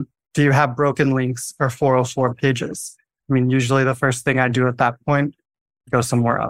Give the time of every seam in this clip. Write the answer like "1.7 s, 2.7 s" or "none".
3.2 s